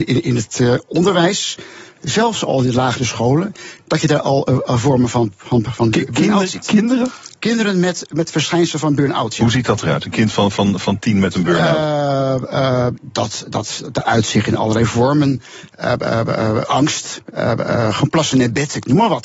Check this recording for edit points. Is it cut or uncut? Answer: uncut